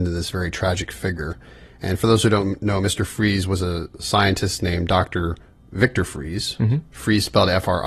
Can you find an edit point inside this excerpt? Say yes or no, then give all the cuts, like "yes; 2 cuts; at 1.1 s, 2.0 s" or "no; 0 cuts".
no; 0 cuts